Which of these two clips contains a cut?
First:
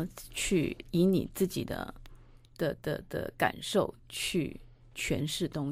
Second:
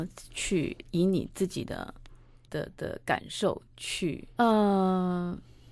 second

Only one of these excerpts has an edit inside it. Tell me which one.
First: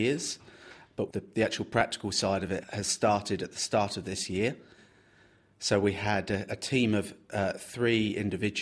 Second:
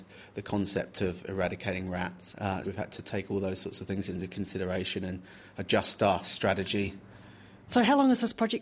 second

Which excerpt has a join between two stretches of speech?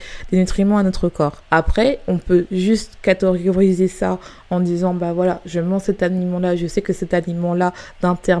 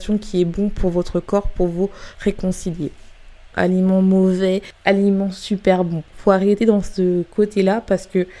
second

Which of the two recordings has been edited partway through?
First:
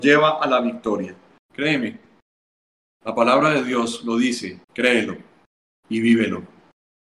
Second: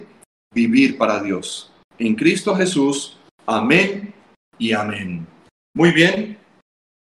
first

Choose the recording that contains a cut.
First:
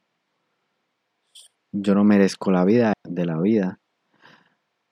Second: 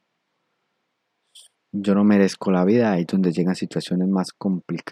first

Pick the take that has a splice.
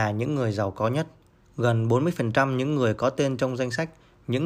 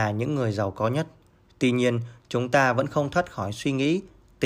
first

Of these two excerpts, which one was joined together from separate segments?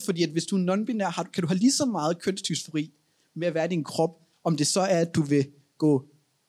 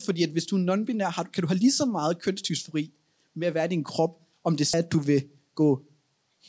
second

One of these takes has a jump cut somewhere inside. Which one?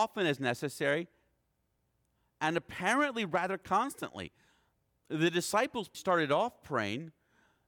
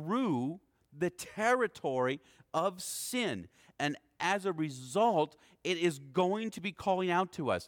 first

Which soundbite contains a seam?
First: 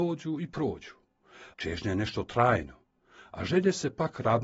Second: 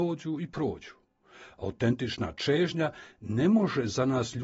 first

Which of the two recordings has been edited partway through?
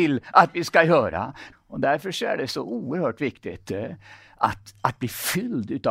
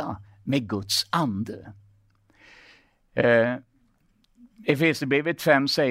first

